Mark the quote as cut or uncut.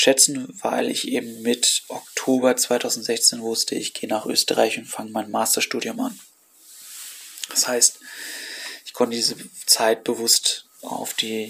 uncut